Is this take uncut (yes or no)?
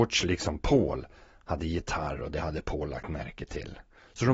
yes